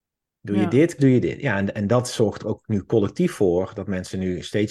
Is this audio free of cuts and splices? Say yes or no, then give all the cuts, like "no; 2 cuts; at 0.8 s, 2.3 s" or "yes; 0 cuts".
no; 1 cut; at 1.0 s